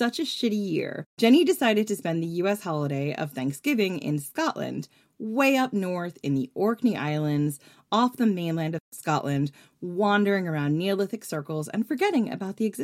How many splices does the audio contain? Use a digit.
1